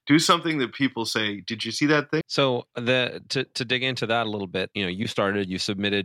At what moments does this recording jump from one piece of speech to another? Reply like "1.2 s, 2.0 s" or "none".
2.2 s, 4.7 s